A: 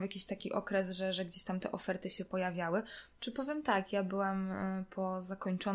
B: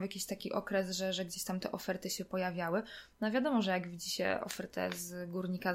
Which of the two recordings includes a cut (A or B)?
A